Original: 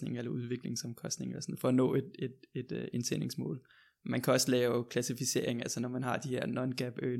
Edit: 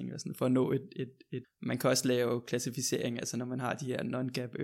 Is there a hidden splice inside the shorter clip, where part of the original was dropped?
yes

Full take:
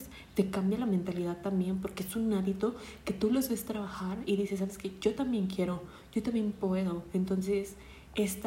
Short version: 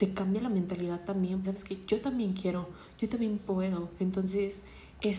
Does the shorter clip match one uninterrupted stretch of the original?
no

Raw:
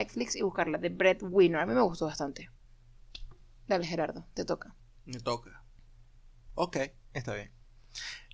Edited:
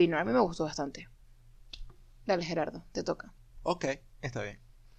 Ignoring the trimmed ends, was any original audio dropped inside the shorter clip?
yes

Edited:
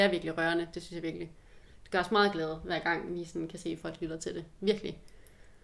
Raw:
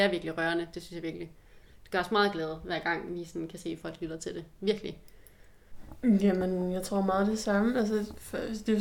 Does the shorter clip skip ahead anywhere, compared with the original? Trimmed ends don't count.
no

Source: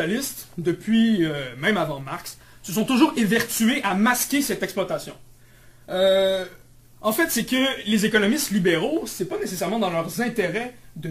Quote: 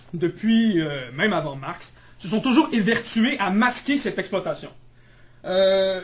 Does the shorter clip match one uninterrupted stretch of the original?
yes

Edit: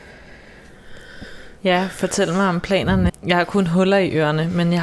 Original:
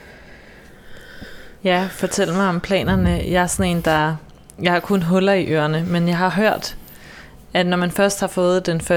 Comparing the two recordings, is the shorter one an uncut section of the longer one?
no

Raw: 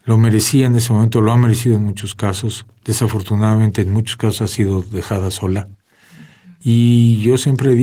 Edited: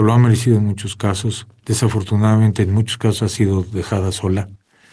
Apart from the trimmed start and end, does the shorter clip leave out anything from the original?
no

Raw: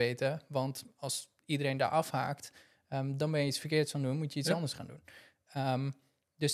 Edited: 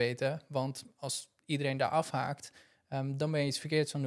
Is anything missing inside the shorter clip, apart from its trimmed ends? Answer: no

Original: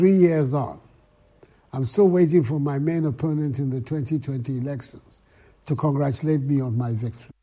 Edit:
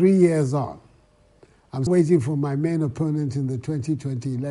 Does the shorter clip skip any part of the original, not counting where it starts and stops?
yes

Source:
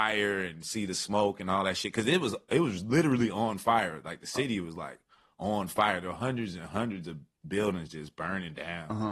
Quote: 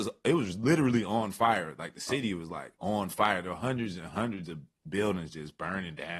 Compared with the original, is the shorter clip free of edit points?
no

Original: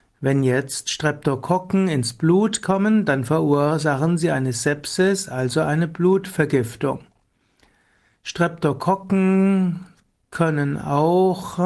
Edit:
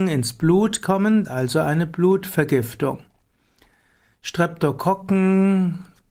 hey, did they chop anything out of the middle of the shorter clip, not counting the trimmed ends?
yes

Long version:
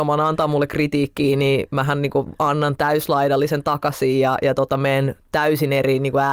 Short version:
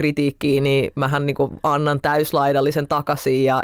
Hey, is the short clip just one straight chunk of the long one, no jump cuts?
yes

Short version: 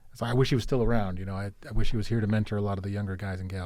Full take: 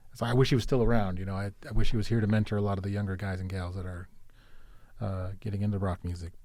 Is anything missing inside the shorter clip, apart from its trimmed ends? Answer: no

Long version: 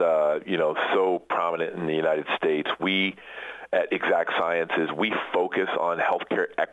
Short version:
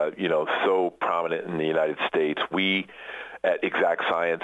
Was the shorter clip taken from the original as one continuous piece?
yes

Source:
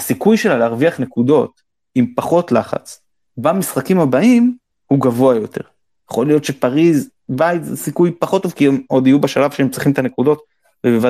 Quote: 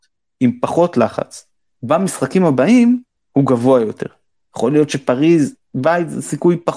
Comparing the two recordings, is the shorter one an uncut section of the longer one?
yes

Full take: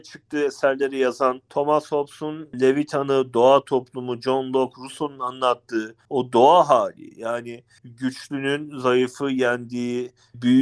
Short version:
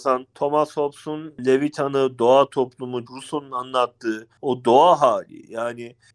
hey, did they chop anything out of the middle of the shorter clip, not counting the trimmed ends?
yes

